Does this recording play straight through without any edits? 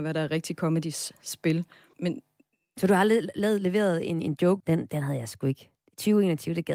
no; 2 cuts; at 1.9 s, 4.6 s

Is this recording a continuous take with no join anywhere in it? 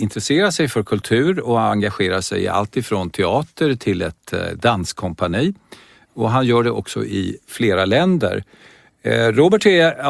yes; 0 cuts

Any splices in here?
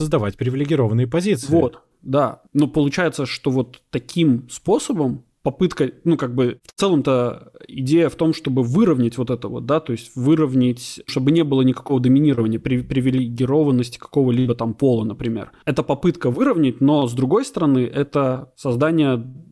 yes; 1 cut; at 11.1 s

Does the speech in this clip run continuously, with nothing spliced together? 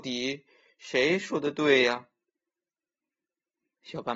yes; 0 cuts

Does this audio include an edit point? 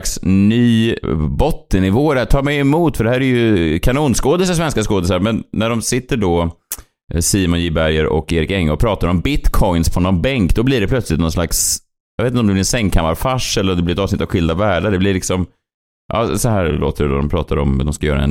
no; 0 cuts

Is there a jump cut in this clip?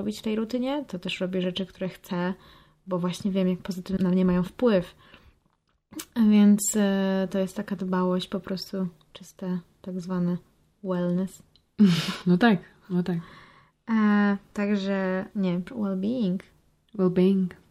yes; 1 cut; at 4.0 s

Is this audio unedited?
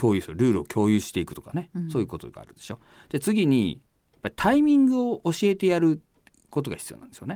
yes; 0 cuts

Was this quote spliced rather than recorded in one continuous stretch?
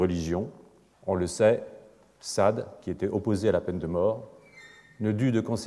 yes; 1 cut; at 0.9 s

